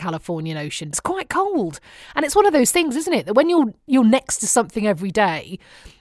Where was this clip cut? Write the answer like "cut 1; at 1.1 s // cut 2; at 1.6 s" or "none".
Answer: cut 1; at 0.9 s